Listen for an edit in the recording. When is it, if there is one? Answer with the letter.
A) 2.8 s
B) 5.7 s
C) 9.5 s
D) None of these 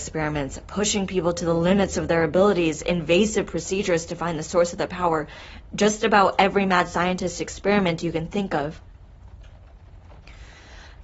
D